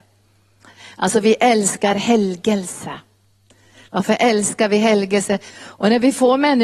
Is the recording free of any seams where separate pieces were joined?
no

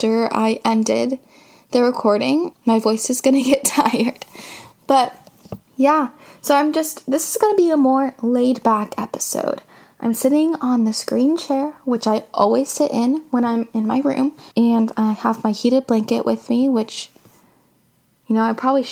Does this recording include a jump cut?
yes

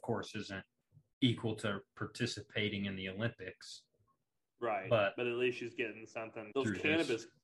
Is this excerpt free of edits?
no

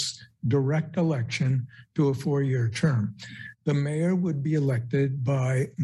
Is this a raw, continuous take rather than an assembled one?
yes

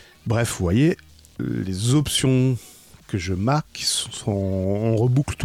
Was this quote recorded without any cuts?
yes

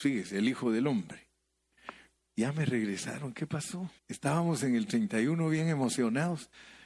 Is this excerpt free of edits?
no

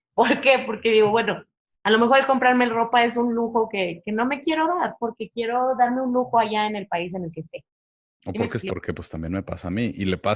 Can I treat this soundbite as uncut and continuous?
no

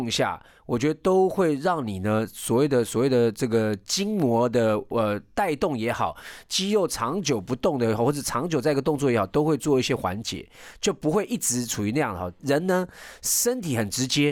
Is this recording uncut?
yes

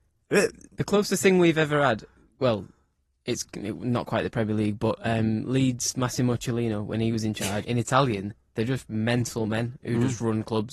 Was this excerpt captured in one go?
no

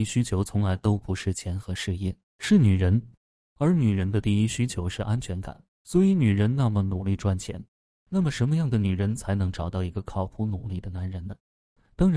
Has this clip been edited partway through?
no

